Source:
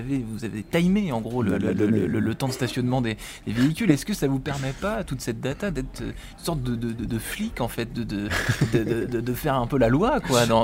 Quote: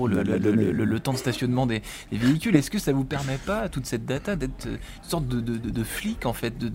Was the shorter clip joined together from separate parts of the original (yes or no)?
no